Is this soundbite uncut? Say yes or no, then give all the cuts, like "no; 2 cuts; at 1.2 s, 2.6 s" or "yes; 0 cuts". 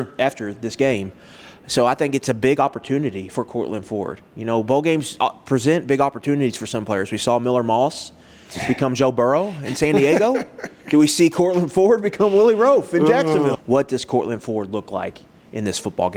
no; 1 cut; at 13.5 s